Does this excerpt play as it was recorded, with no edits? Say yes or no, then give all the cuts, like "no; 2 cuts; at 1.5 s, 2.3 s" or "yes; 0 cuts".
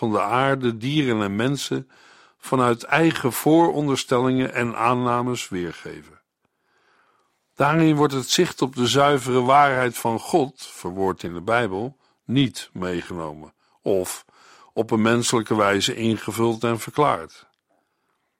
yes; 0 cuts